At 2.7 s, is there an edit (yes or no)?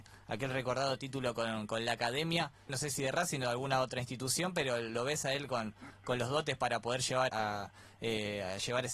yes